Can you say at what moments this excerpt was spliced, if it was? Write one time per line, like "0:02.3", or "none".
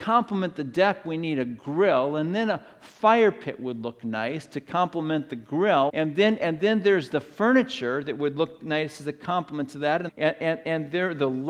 0:05.9
0:10.1